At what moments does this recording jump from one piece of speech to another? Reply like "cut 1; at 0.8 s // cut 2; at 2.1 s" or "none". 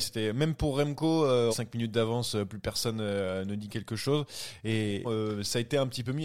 cut 1; at 1.5 s // cut 2; at 5.0 s